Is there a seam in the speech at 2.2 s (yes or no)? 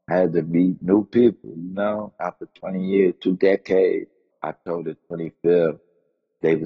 no